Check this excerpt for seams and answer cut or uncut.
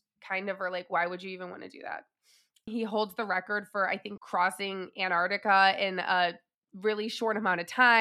cut